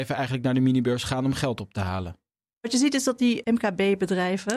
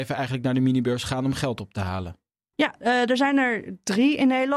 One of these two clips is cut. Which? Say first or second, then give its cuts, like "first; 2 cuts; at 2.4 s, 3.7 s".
second; 1 cut; at 2.5 s